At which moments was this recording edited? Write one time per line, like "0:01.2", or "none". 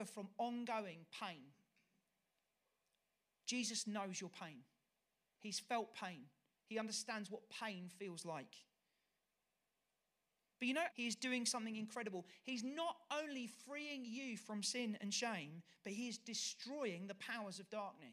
0:10.9